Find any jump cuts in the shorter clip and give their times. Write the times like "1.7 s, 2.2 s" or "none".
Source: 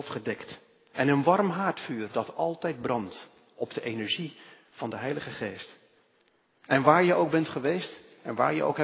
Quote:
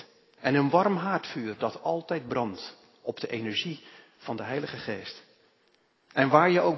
none